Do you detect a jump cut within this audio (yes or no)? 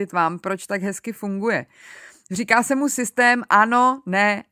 no